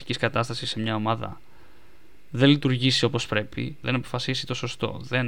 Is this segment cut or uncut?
cut